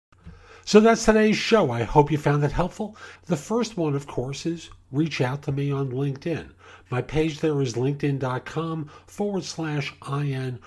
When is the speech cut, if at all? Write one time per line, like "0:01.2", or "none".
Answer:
0:03.2